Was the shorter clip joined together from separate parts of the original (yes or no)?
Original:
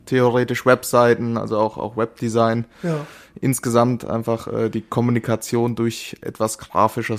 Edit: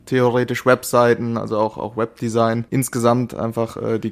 yes